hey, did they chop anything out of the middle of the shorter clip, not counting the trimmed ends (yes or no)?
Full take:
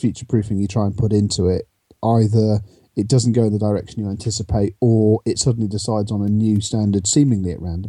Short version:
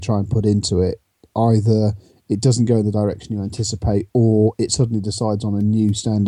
no